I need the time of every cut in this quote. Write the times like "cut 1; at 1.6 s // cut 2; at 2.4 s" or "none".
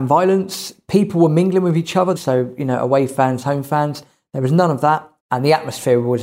cut 1; at 2.2 s // cut 2; at 5.2 s